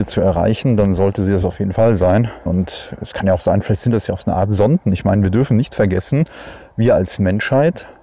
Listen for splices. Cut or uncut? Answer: cut